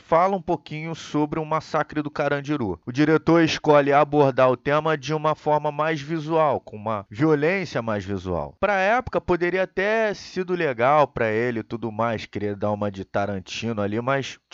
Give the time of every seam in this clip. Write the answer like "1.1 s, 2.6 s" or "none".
none